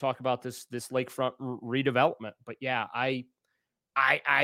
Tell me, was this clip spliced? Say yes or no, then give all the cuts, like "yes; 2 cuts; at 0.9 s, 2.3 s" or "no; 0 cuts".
no; 0 cuts